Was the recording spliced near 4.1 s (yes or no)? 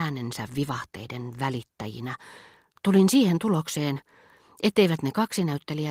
no